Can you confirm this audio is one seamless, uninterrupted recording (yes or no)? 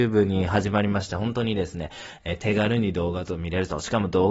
yes